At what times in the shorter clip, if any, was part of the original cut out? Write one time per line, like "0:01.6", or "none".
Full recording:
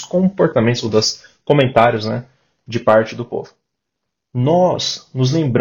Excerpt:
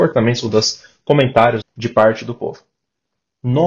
0:01.6

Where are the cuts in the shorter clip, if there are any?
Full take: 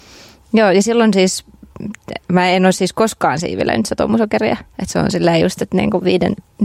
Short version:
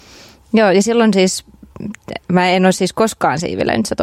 none

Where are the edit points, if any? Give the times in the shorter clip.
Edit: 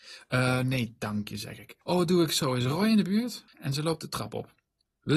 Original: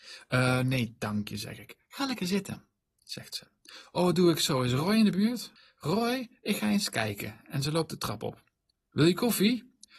0:01.8
0:03.5

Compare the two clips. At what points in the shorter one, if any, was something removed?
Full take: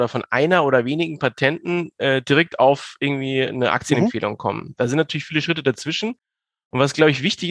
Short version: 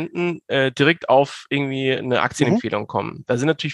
none

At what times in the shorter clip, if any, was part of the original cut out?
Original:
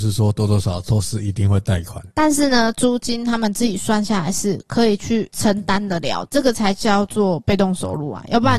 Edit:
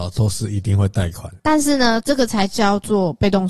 0:02.0

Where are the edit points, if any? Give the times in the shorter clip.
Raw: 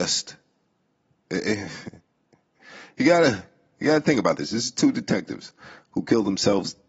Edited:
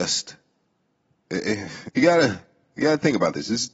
0:01.9

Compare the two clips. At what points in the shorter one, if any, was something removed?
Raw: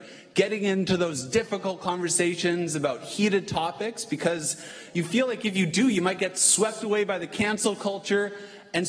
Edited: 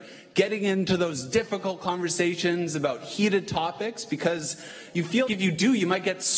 0:05.3

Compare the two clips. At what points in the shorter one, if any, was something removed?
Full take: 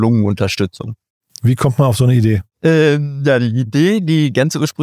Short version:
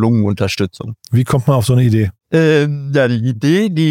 0:01.0

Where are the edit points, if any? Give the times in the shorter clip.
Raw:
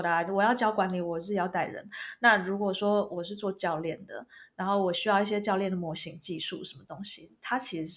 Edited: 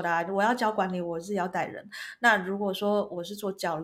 none

